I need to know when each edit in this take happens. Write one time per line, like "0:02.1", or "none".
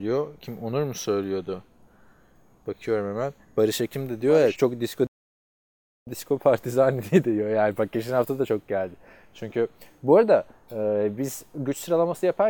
0:04.5